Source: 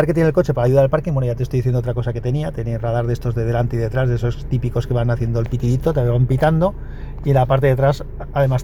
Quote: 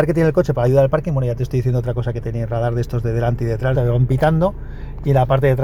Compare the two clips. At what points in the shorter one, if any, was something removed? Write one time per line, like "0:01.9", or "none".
0:02.2
0:03.7